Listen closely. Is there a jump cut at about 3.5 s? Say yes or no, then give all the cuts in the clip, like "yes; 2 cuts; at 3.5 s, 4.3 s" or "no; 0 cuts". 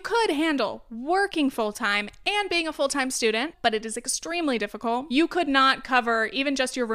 yes; 1 cut; at 3.5 s